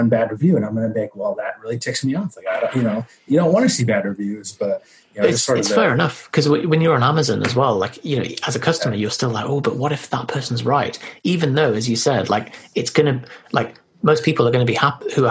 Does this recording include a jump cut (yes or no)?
no